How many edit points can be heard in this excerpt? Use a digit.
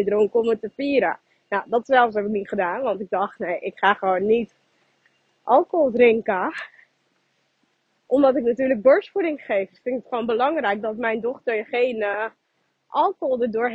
0